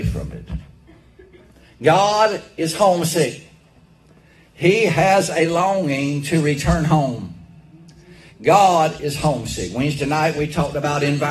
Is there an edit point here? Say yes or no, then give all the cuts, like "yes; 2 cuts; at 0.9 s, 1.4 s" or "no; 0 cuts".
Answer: yes; 1 cut; at 8.3 s